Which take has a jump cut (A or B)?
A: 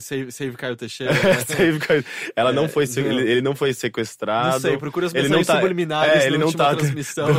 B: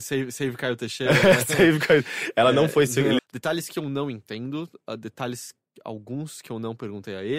B